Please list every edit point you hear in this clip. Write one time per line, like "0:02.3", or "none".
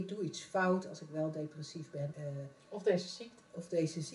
0:02.1